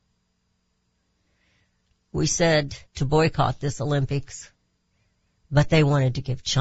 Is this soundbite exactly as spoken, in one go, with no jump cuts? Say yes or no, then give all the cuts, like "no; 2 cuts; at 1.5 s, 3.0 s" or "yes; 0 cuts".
no; 1 cut; at 2.9 s